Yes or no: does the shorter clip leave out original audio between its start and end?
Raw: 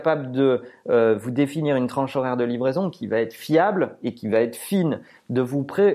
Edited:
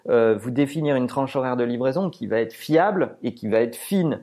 no